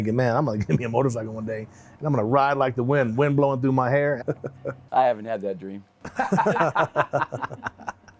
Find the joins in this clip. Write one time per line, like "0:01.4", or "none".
0:04.2